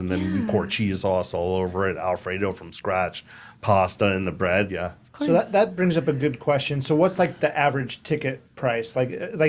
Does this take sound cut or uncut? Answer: cut